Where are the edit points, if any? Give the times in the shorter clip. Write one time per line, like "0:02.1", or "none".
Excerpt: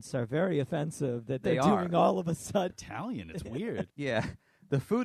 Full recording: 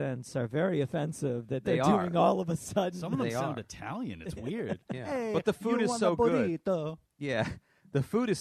0:02.7
0:03.9